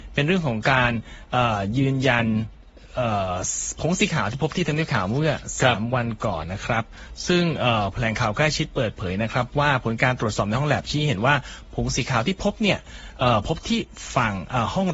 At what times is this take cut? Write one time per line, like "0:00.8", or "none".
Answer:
0:06.4